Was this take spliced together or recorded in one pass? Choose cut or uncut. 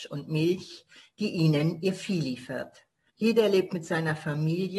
cut